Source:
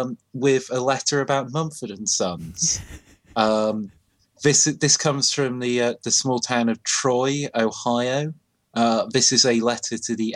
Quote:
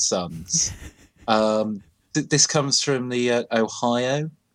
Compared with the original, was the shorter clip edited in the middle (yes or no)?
yes